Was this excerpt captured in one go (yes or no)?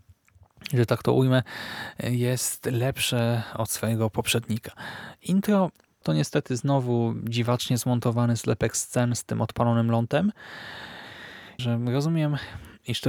no